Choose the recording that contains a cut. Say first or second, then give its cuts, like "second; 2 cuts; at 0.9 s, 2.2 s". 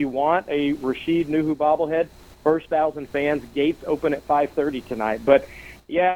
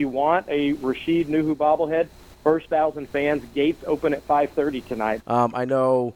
second; 1 cut; at 5.2 s